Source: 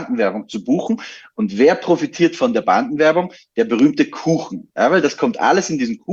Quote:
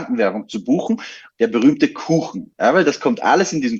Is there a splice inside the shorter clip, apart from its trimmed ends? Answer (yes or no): yes